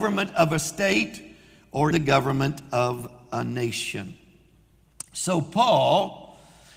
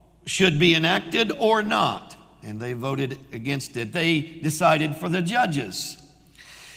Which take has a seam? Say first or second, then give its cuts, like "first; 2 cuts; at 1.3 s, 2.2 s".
first; 1 cut; at 1.9 s